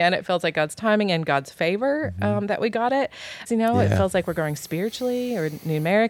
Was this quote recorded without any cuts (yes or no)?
no